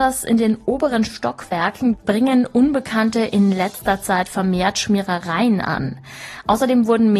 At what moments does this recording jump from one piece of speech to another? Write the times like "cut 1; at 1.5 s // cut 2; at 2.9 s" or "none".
none